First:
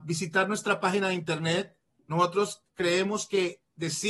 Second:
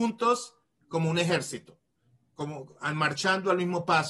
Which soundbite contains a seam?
first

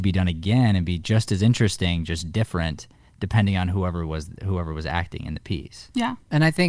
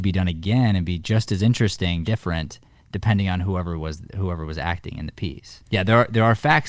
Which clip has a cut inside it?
second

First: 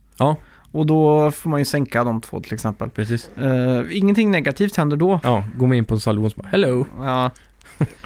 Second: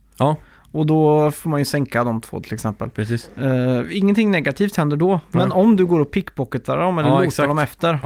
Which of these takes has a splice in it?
first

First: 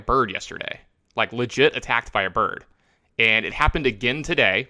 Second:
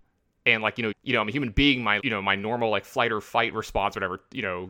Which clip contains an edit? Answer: second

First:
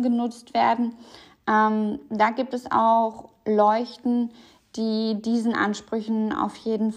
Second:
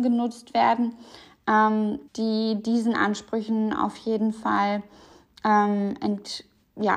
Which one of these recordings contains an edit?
second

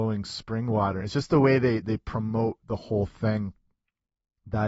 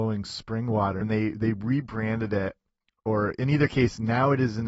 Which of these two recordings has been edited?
second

